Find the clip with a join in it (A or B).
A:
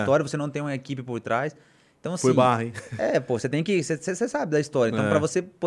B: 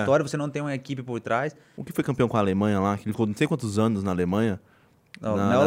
B